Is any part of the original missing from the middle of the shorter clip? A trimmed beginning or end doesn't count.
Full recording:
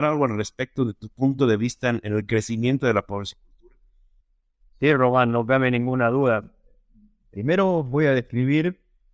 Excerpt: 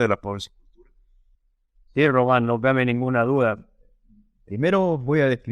no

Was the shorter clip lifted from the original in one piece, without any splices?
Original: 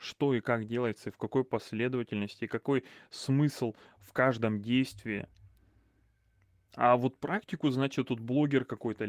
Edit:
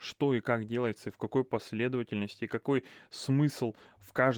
yes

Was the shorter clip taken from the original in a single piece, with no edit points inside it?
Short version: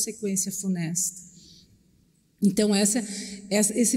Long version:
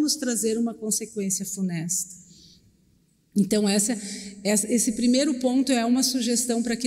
yes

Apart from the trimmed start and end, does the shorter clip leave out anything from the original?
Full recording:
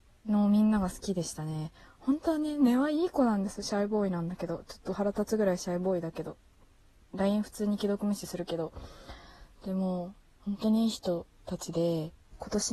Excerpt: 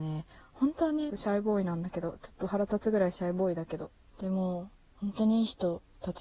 yes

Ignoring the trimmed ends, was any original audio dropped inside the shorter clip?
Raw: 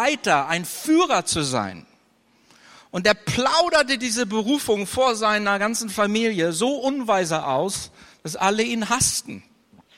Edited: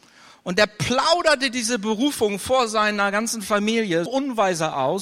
yes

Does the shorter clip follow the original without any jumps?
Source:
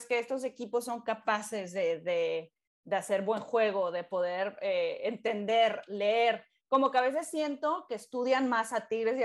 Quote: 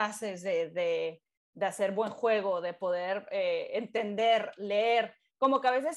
yes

